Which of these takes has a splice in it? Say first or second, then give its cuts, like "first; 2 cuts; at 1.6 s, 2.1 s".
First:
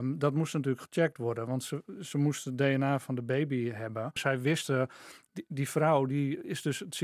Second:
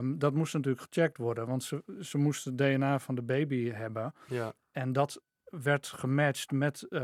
first; 1 cut; at 4.2 s